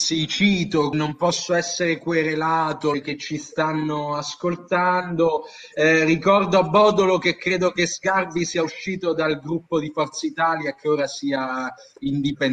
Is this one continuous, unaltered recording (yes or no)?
no